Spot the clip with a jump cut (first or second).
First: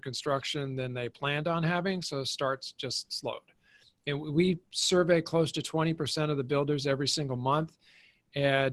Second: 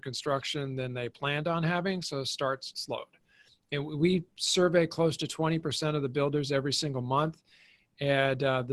second